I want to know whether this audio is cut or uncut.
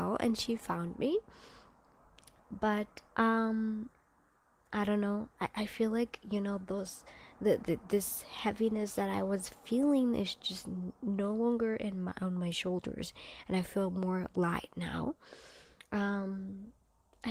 cut